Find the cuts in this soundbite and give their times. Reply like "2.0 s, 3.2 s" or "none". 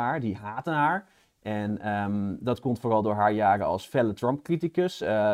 none